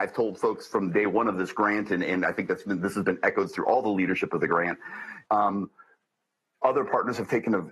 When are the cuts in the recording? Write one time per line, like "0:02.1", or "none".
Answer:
0:05.3

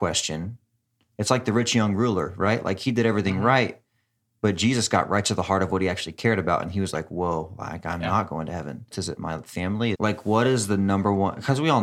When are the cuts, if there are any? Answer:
0:08.9
0:09.9

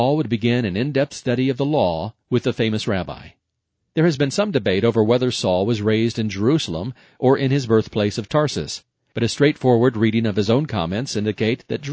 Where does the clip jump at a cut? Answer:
none

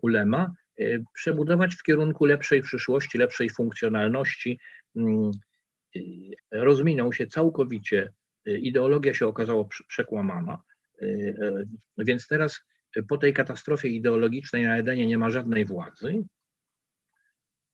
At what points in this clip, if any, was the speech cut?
0:06.4
0:11.8

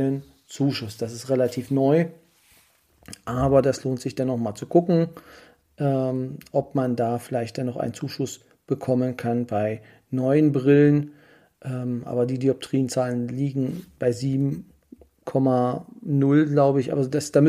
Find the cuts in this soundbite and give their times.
none

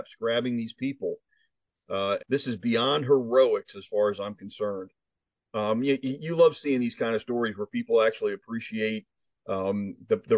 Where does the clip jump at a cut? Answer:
0:02.2

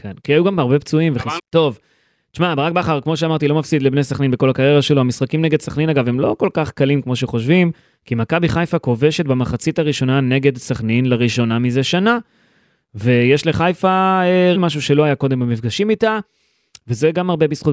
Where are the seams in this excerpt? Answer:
0:01.4
0:14.5

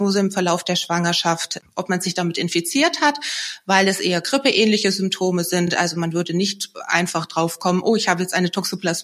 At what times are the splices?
none

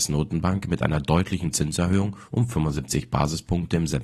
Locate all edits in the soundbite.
none

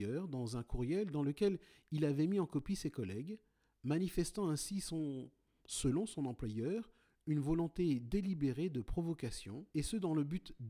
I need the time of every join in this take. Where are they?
0:09.7

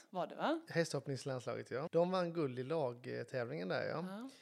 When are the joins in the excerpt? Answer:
0:01.9

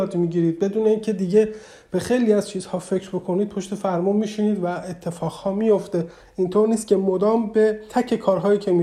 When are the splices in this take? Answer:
0:07.9

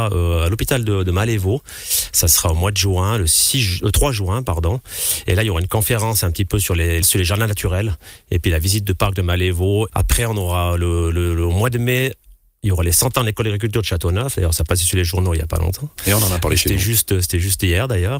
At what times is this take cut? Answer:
0:07.0
0:09.9

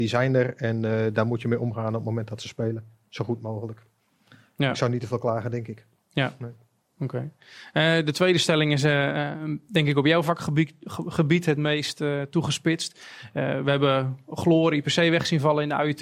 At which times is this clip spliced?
none

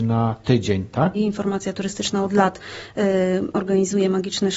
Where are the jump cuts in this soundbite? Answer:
0:01.1

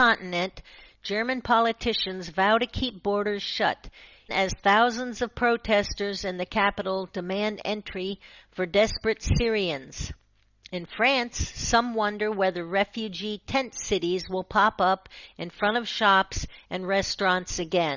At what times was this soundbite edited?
0:04.3

